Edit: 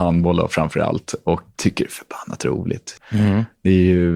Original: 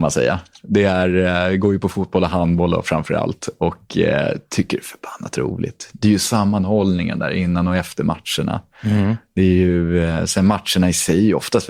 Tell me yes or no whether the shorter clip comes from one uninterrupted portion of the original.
no